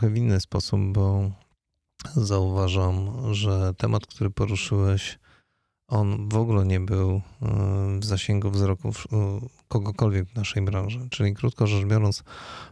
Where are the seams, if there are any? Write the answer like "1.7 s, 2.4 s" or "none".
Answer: none